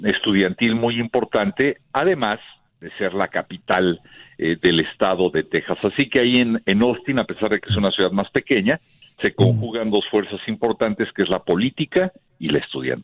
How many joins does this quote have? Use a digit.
0